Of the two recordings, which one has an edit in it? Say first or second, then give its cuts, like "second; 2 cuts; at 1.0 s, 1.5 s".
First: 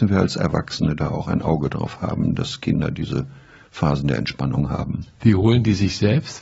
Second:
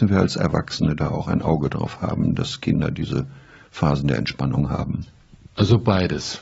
first; 1 cut; at 5.2 s